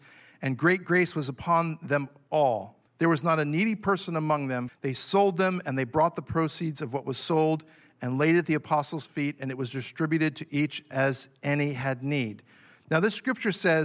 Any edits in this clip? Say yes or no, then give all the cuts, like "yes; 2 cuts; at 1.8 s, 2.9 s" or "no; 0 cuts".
yes; 2 cuts; at 2.9 s, 4.7 s